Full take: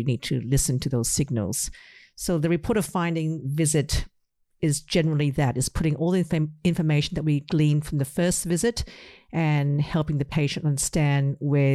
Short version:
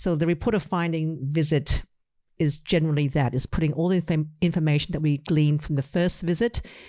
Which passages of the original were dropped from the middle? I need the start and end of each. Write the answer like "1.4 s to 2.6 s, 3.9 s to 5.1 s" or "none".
none